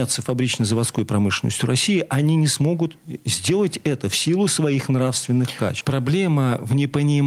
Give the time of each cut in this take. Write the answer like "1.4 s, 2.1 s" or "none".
5.8 s